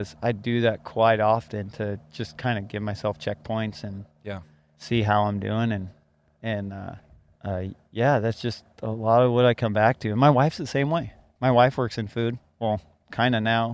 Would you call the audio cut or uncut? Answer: uncut